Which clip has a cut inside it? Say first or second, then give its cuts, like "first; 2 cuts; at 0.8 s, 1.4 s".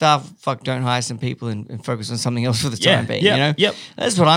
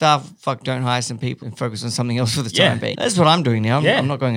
second; 2 cuts; at 1.4 s, 2.9 s